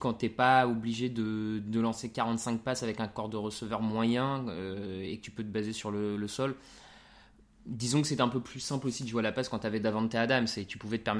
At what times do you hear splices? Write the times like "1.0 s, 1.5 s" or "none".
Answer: none